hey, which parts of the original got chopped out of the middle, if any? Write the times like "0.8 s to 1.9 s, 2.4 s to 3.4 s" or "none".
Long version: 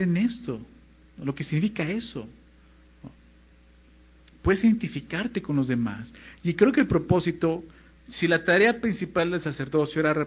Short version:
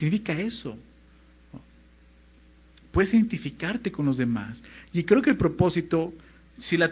none